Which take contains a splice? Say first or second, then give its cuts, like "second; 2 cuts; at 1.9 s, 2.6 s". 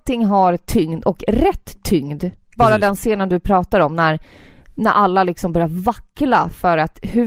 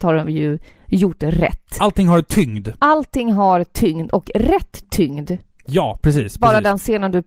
first; 1 cut; at 2.6 s